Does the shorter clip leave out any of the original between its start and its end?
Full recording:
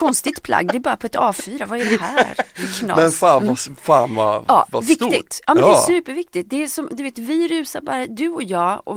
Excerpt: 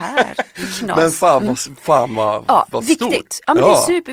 no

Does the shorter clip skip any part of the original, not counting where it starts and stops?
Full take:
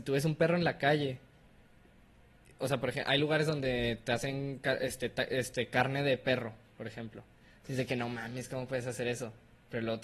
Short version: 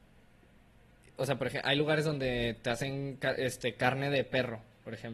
yes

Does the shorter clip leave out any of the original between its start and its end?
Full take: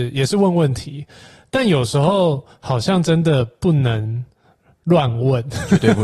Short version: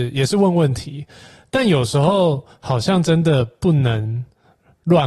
no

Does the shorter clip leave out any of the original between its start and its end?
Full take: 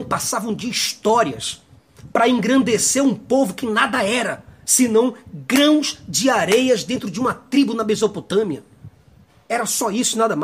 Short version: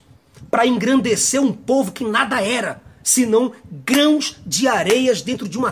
no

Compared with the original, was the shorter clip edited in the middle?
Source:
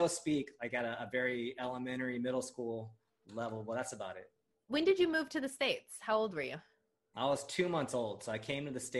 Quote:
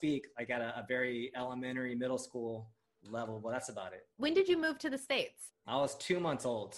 yes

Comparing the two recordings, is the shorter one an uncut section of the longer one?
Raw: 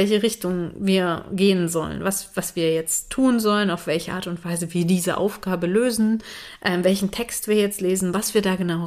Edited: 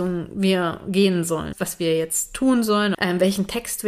no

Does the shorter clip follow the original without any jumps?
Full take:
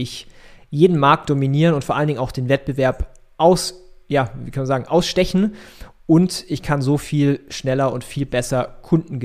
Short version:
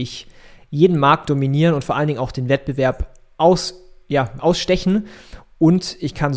no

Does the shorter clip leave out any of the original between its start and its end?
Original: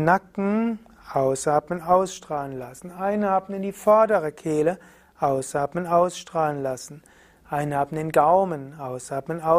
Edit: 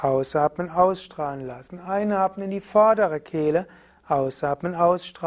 no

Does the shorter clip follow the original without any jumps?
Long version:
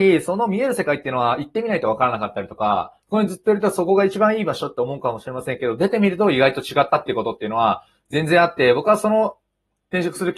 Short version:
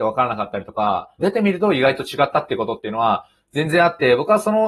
no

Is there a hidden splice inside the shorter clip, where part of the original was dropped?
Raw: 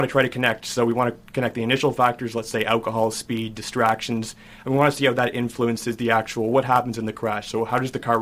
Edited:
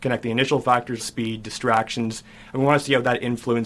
yes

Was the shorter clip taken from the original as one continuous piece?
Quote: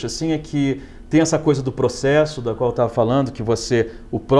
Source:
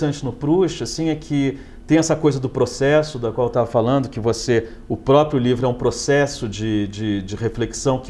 yes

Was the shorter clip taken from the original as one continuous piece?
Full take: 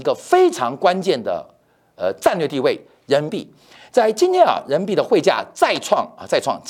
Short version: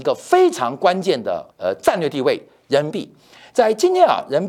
no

